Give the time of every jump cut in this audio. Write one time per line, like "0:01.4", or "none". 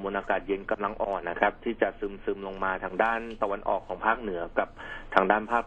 0:01.2